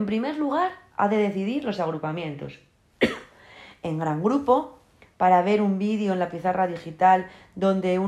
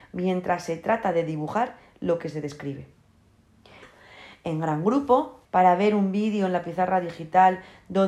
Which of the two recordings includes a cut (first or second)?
second